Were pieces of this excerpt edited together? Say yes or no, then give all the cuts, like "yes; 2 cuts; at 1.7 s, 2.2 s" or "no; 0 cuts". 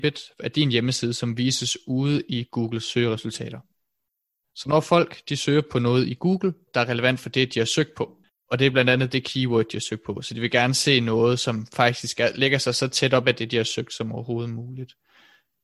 yes; 1 cut; at 6.7 s